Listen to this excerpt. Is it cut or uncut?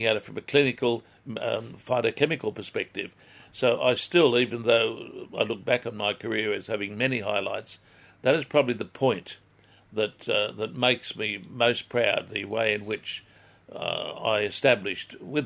uncut